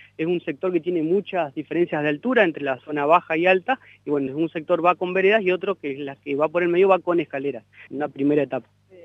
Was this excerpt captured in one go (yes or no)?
no